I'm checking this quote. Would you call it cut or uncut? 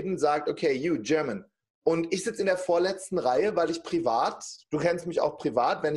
cut